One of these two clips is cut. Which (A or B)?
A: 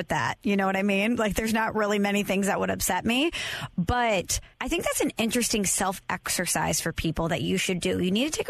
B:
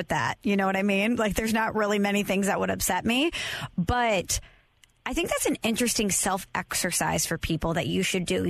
A